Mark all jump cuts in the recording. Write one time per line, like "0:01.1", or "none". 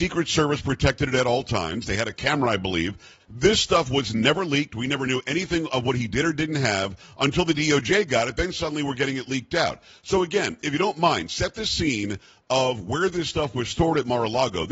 0:03.2